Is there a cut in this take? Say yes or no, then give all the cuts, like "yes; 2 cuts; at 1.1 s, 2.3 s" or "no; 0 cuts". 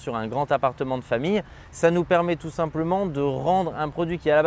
no; 0 cuts